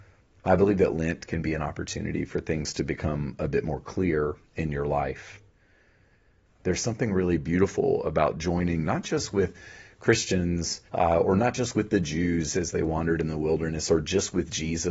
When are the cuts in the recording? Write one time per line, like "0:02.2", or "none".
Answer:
0:06.5
0:10.9